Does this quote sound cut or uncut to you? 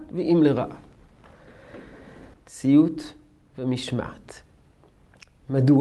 cut